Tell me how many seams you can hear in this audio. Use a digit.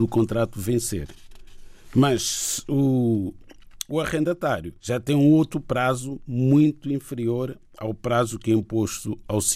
1